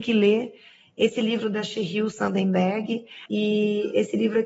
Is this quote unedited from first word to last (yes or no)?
no